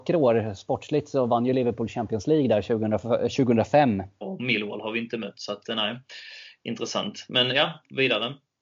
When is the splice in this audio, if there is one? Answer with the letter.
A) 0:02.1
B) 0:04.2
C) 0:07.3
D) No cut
B